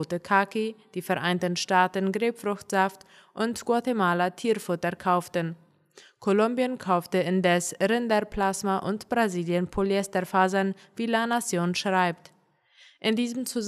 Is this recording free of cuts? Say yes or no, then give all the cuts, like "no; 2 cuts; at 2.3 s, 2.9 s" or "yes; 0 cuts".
yes; 0 cuts